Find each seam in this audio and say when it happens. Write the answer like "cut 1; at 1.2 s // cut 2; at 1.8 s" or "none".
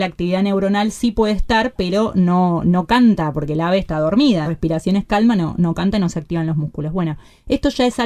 cut 1; at 4.4 s